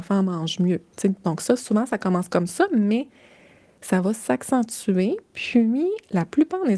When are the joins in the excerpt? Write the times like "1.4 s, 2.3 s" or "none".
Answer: none